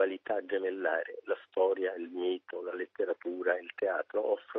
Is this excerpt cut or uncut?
uncut